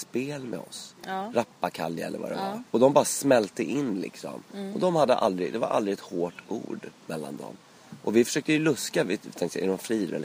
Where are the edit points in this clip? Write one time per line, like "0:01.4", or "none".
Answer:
0:02.7